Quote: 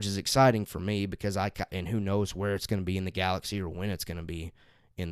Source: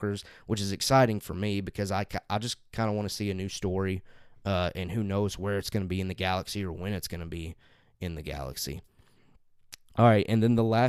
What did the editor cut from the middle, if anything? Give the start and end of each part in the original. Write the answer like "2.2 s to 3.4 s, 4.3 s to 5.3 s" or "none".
2.2 s to 4.7 s